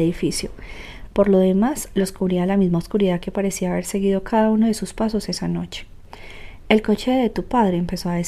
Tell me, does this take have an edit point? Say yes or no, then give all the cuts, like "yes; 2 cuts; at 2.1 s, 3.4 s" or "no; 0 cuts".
yes; 1 cut; at 1.1 s